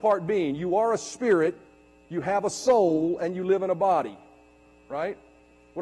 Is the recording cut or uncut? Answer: uncut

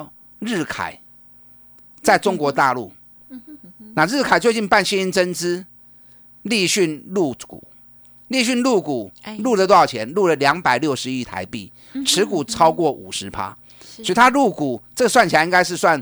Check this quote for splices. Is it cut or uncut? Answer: uncut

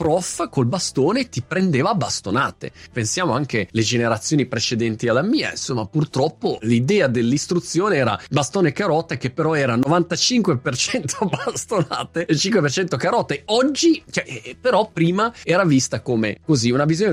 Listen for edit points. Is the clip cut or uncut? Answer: cut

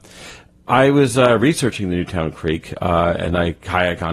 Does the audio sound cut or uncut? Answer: uncut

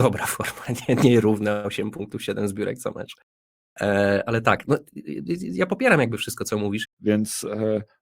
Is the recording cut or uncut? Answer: cut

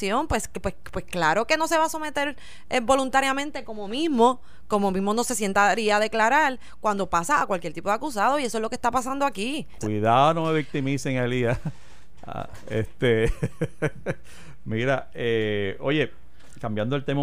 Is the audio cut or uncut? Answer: cut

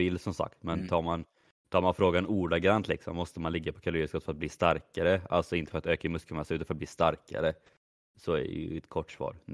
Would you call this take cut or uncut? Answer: uncut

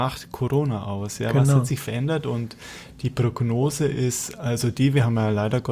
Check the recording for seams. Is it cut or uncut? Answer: uncut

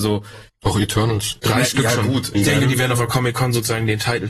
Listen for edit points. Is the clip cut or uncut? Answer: cut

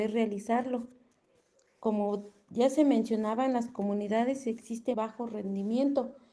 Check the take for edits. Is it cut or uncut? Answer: cut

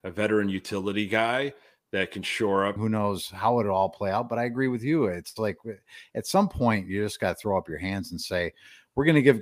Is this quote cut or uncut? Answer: cut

